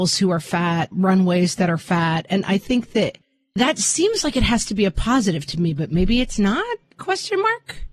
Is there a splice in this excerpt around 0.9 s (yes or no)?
yes